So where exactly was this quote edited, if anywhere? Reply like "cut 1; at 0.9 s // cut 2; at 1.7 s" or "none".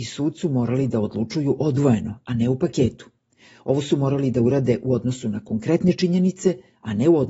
none